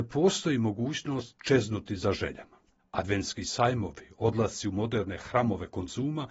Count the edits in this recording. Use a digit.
1